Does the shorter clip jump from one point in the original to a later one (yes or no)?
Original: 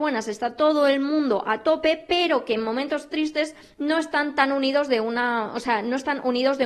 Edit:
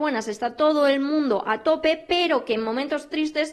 no